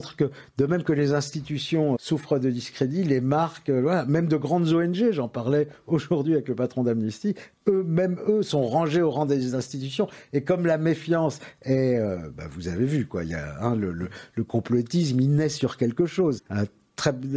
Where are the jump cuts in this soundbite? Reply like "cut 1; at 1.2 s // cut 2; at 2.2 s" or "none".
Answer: cut 1; at 1.9 s // cut 2; at 16.4 s